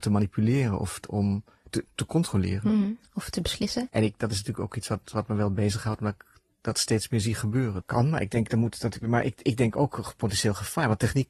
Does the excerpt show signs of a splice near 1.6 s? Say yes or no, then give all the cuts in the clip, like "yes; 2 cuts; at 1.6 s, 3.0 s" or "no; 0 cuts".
no; 2 cuts; at 3.9 s, 7.8 s